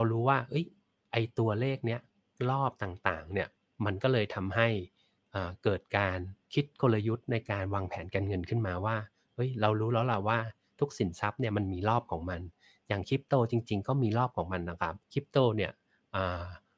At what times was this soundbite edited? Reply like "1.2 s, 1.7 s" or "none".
6.4 s, 15.0 s